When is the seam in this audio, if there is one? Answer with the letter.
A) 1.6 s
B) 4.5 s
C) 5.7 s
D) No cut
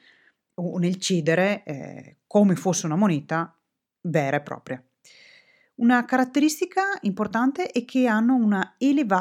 D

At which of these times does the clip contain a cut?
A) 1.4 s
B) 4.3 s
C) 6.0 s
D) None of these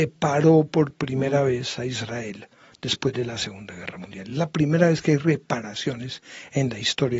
D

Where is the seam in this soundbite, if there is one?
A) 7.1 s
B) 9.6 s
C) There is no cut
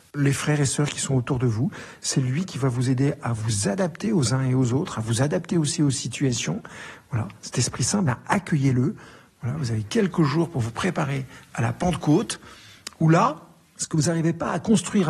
C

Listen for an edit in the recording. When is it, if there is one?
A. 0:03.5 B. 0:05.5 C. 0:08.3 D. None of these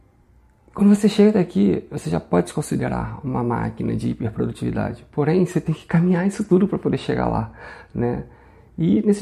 D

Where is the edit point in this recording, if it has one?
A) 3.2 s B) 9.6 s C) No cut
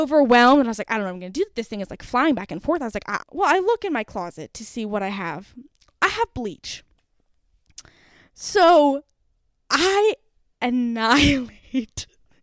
A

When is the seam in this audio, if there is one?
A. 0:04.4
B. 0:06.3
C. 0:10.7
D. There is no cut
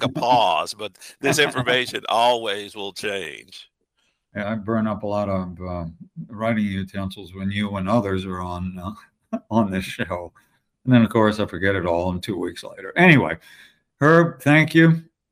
A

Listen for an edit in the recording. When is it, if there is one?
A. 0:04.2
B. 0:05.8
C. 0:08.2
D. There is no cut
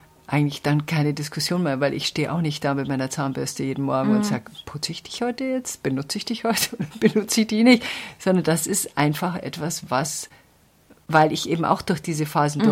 D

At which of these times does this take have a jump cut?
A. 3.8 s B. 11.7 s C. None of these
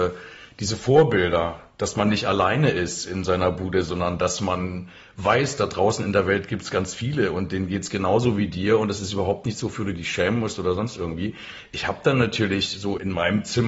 C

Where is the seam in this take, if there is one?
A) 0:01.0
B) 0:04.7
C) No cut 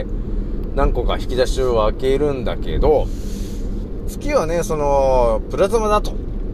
C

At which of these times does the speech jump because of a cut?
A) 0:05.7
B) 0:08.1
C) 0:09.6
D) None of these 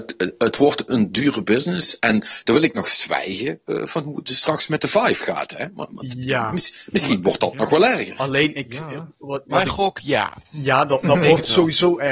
D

